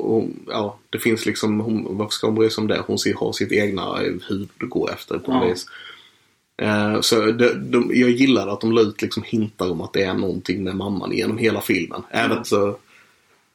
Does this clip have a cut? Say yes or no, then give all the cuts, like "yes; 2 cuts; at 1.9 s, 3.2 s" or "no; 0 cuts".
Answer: yes; 1 cut; at 12.4 s